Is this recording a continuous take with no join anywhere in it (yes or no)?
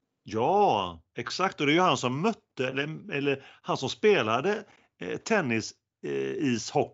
yes